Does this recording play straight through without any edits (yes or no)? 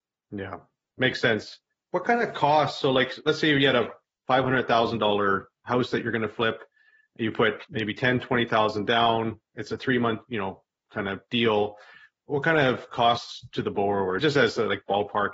yes